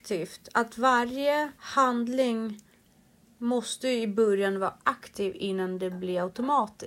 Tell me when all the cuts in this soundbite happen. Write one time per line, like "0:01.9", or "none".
0:01.6